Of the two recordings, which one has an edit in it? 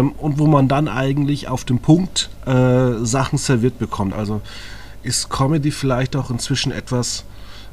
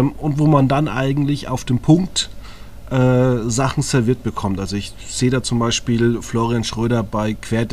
first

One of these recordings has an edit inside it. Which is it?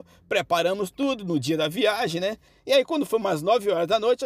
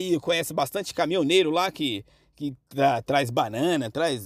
first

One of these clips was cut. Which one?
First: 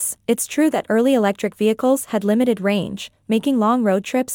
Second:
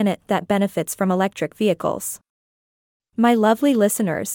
second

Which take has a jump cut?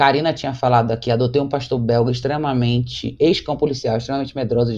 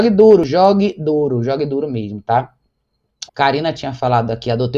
second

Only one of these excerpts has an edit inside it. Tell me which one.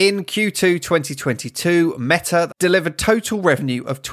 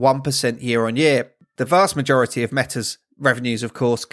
first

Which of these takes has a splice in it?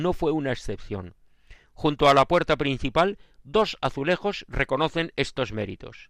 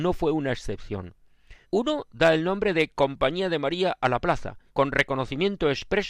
second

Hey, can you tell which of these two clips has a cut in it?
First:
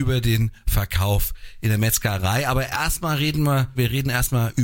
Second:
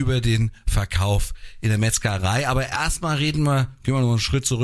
first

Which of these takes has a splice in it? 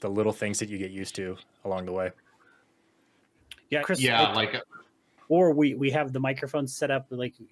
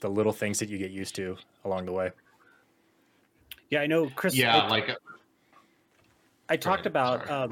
first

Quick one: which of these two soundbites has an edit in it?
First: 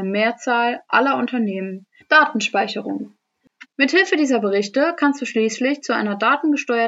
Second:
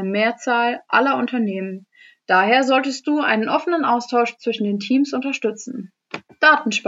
first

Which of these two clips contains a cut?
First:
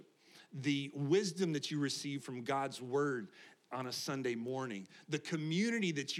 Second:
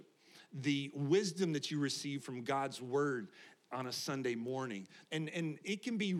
second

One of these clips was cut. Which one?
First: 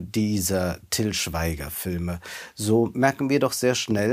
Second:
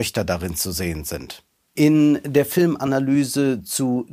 second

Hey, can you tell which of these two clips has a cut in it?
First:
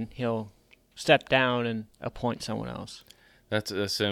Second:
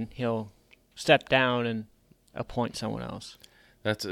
first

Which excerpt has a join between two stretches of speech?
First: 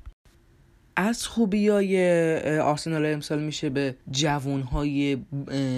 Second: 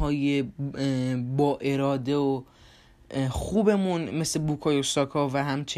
first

